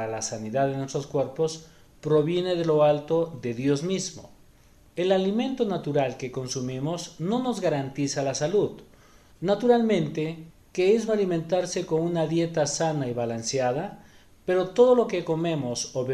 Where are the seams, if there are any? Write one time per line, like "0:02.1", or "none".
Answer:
0:11.1